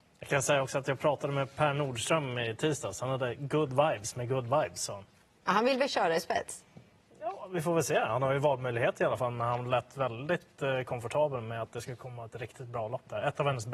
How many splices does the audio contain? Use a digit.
0